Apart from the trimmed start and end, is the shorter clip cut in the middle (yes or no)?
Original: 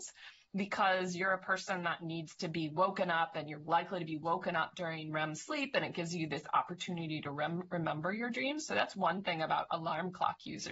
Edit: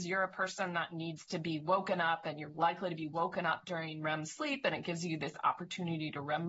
no